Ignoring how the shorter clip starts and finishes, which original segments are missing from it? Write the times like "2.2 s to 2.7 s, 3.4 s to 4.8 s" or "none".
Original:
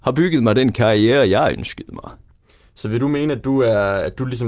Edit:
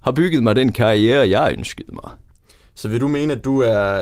none